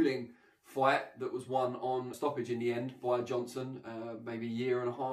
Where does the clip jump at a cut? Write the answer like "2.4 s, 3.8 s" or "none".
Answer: 2.1 s